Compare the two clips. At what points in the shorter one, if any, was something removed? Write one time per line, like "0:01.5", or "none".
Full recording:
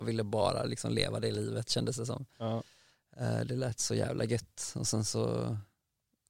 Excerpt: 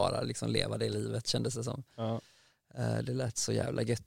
none